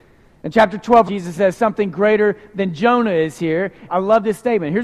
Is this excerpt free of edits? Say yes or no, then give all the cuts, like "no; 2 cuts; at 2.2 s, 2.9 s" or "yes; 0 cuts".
no; 2 cuts; at 1.1 s, 3.9 s